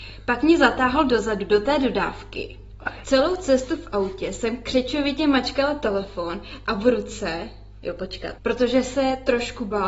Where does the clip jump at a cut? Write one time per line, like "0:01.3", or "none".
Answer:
0:03.0
0:08.4